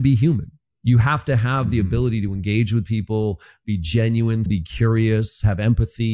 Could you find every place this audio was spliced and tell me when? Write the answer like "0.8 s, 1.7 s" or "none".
4.5 s